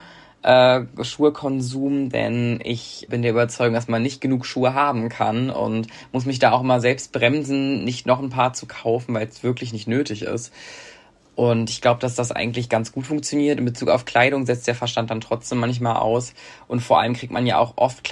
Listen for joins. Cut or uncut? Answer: cut